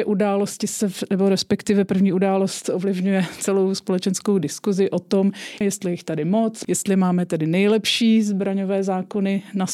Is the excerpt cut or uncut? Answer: cut